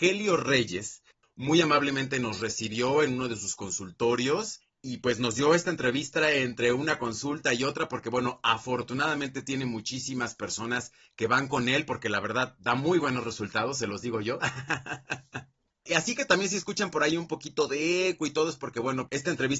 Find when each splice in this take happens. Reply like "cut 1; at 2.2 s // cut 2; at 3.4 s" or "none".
none